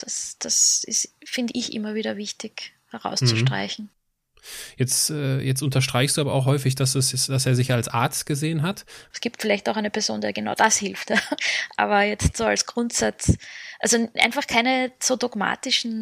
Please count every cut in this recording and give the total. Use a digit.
1